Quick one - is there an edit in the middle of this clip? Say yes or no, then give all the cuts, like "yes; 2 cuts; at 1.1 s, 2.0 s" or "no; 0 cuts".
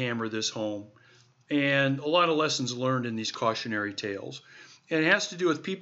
no; 0 cuts